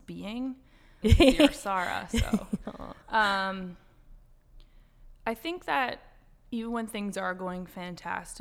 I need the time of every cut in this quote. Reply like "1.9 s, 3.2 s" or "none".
1.0 s